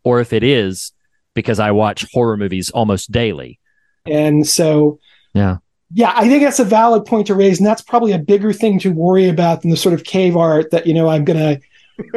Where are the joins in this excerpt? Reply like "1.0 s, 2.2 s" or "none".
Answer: 4.1 s